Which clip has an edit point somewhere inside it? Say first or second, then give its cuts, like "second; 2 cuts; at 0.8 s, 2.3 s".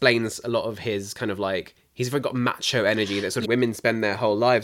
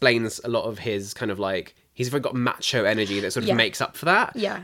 first; 1 cut; at 3.4 s